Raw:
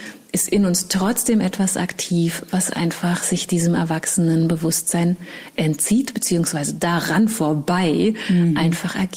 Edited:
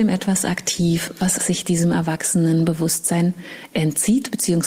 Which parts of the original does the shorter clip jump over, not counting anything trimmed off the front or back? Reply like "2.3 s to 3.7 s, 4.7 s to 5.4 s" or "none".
2.7 s to 3.2 s